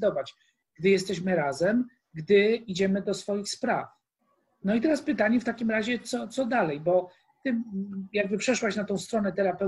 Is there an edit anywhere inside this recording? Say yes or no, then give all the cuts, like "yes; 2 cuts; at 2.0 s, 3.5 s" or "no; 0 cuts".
no; 0 cuts